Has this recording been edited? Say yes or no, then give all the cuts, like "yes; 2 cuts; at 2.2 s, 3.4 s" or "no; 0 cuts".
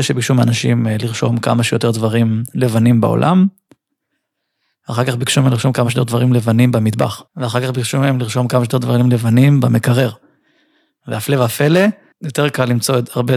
yes; 2 cuts; at 7.3 s, 12.1 s